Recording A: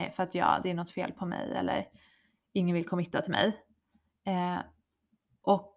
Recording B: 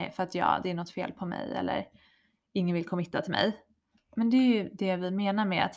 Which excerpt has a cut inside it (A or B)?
B